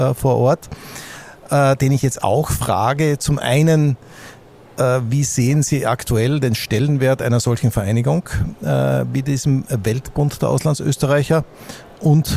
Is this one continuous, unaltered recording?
yes; 0 cuts

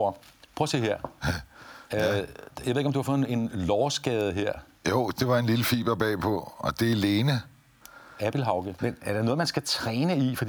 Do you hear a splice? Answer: yes; 1 cut; at 8.8 s

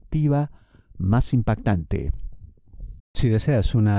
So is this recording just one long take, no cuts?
no; 1 cut; at 3.0 s

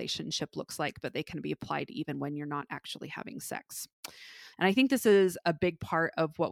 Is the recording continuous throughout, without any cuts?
no; 1 cut; at 4.5 s

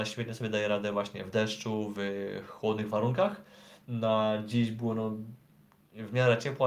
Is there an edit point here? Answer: no; 0 cuts

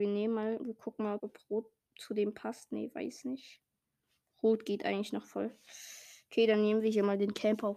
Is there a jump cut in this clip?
yes; 1 cut; at 1.2 s

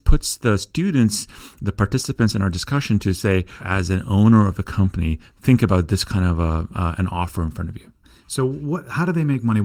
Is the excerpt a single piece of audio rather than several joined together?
no; 1 cut; at 3.6 s

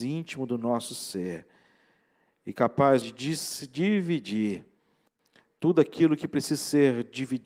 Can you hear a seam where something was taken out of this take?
yes; 1 cut; at 3.0 s

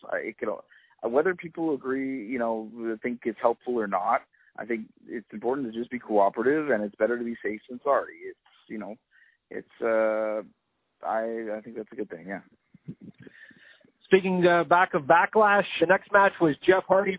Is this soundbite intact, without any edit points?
no; 1 cut; at 15.8 s

